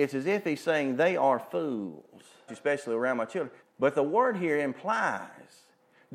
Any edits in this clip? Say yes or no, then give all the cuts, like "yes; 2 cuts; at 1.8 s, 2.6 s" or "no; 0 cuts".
yes; 2 cuts; at 2.5 s, 3.6 s